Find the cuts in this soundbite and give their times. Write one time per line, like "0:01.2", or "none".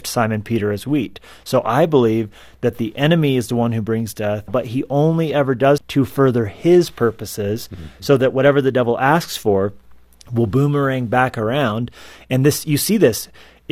0:04.5
0:05.8